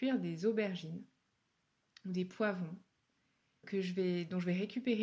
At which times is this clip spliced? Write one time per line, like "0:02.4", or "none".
0:03.6